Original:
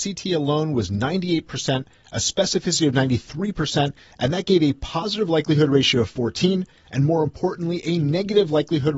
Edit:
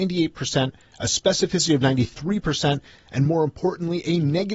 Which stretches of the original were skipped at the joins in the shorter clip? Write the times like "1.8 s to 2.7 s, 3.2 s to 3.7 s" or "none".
4.1 s to 6.8 s